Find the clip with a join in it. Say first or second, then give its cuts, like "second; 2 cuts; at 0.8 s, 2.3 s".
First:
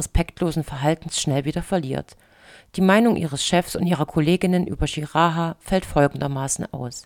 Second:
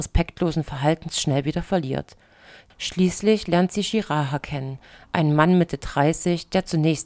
second; 1 cut; at 2.7 s